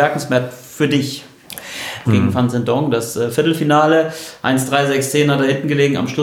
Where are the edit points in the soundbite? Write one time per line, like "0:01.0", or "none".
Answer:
0:02.1